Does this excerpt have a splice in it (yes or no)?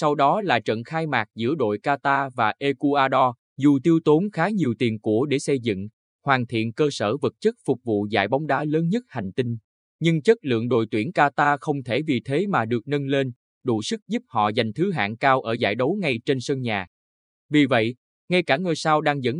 yes